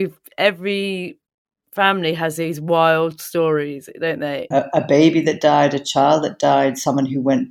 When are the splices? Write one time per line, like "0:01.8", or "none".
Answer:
0:04.5